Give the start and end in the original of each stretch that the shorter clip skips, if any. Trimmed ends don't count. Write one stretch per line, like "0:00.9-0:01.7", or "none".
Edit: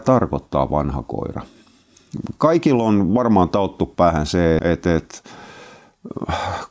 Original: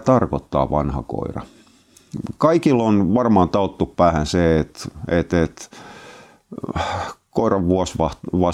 0:04.6-0:05.1